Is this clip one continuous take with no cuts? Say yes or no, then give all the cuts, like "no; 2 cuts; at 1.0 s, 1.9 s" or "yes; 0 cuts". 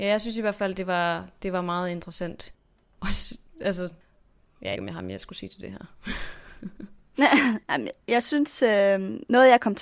no; 1 cut; at 4.8 s